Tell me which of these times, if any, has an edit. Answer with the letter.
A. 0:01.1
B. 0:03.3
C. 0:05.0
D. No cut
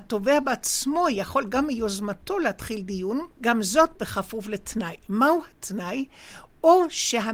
B